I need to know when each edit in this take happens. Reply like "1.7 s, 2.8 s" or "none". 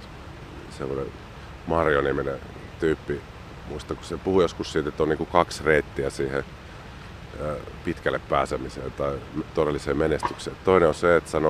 none

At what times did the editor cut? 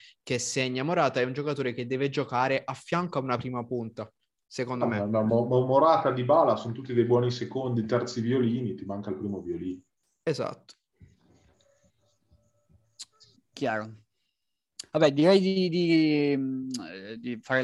none

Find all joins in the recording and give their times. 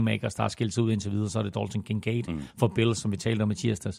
none

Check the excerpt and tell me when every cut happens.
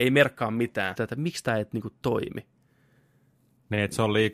1.0 s

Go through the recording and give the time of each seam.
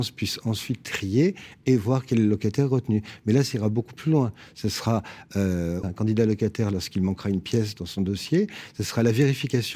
5.8 s

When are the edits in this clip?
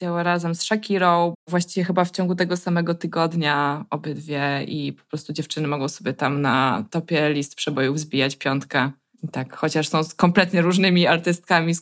1.3 s

